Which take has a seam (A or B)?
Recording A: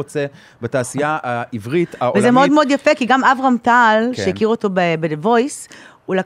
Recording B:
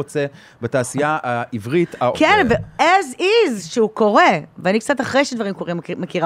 B